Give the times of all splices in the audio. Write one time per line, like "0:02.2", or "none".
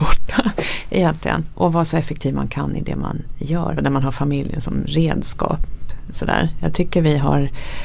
0:03.8